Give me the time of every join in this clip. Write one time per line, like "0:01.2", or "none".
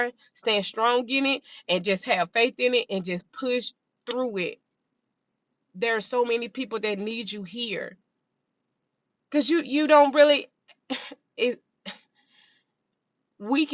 0:09.2